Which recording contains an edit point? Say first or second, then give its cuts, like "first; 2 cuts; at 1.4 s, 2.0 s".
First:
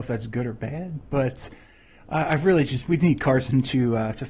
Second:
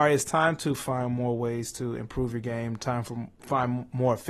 second; 1 cut; at 3.3 s